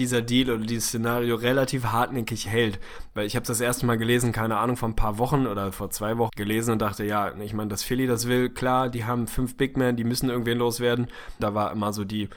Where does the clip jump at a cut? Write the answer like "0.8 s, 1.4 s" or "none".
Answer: 6.3 s, 11.4 s